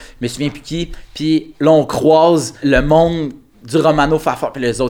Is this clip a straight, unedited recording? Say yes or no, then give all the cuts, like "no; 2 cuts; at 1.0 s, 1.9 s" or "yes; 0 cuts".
no; 1 cut; at 2.6 s